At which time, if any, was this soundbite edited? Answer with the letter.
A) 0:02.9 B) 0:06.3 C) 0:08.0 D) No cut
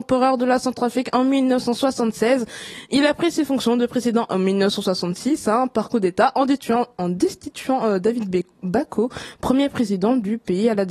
D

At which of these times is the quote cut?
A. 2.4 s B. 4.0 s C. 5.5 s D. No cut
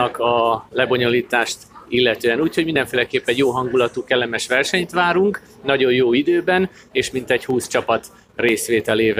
D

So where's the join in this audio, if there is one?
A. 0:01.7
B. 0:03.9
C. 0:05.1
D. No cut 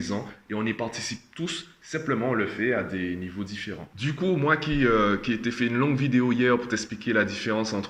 D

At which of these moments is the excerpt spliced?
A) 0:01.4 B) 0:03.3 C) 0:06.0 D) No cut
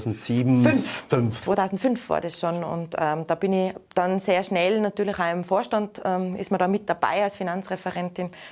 D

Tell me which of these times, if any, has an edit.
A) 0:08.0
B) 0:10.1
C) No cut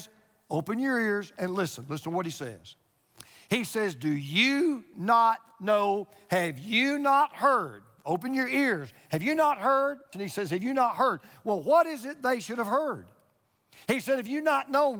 B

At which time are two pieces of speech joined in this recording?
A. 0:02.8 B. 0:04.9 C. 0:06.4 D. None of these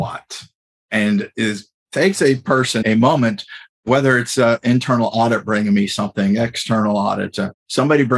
A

